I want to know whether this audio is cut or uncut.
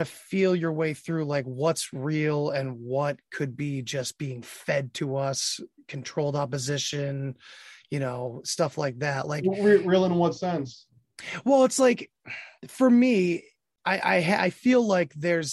uncut